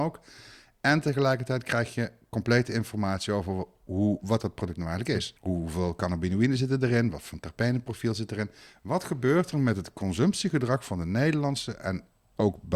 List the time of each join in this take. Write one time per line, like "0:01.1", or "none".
0:05.4